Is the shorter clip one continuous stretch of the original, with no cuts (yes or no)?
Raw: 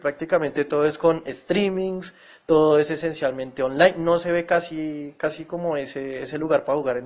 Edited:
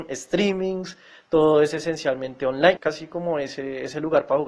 no